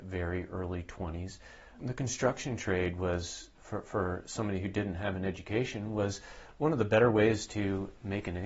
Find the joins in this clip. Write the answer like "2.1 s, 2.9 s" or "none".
none